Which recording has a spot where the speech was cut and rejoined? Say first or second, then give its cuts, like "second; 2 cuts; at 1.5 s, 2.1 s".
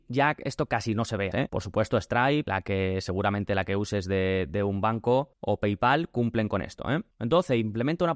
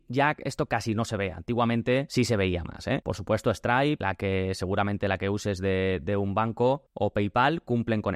first; 1 cut; at 1.3 s